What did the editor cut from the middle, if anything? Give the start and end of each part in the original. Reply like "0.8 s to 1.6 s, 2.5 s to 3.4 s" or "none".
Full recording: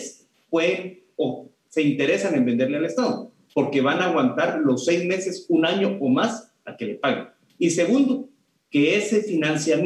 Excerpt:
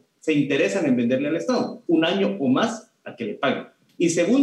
3.4 s to 5.5 s